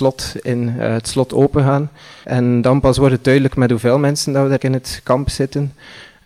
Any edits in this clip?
yes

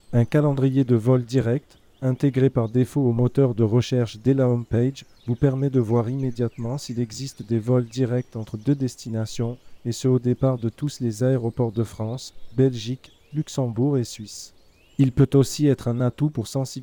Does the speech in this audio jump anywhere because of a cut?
no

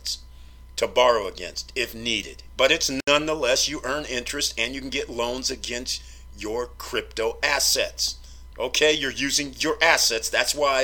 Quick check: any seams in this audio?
yes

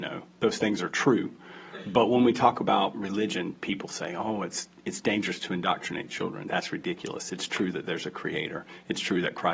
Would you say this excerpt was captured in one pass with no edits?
yes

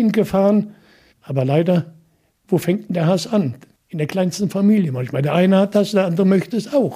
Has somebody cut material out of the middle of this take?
yes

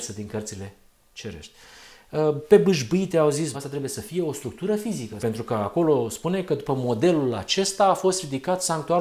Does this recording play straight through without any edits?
no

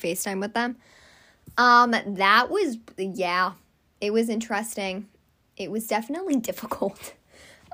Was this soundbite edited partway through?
no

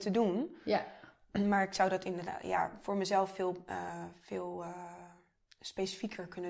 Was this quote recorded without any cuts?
yes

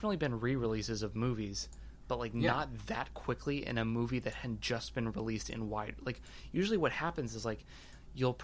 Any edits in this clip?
no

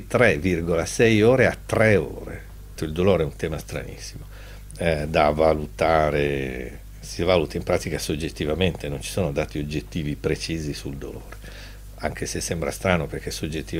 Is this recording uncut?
no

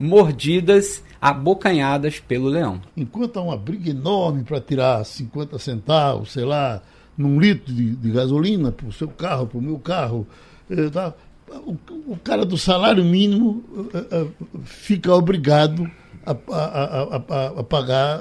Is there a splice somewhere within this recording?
yes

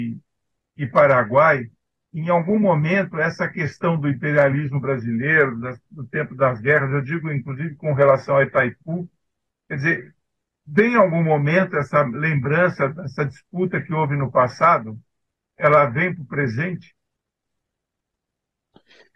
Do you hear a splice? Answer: no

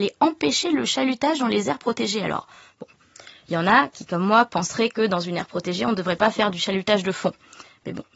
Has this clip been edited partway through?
no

